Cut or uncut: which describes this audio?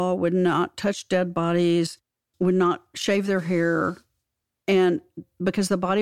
cut